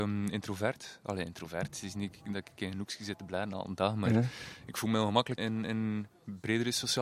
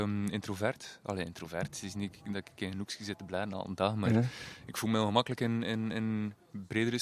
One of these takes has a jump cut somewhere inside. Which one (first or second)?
first